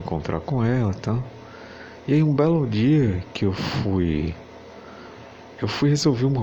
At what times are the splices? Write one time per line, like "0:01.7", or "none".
none